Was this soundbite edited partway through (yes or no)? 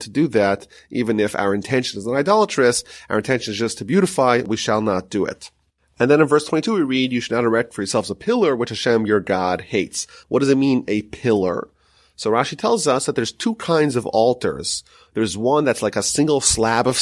no